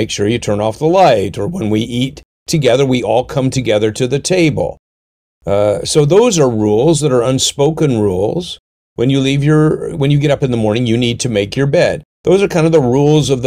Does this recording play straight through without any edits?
yes; 0 cuts

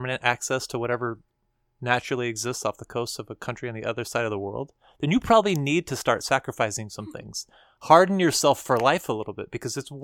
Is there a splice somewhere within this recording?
no; 0 cuts

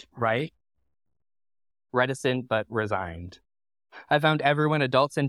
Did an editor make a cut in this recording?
yes; 1 cut; at 1.7 s

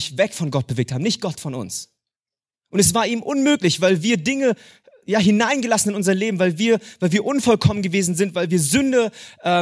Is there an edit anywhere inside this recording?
no; 0 cuts

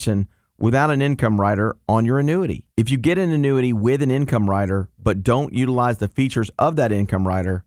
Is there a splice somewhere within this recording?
yes; 1 cut; at 2.7 s

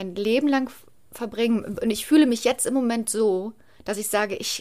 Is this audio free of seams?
yes; 0 cuts

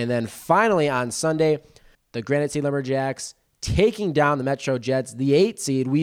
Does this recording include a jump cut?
yes; 1 cut; at 1.9 s

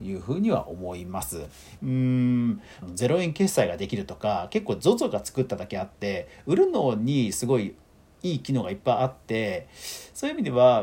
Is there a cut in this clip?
yes; 2 cuts; at 1.8 s, 2.8 s

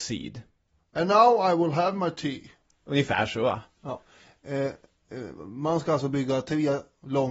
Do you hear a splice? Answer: no; 0 cuts

